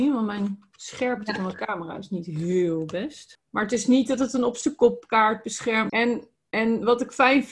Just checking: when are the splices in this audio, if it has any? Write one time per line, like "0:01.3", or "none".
0:03.4
0:05.9